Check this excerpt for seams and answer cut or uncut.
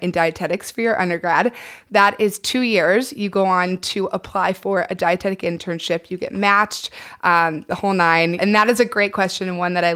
cut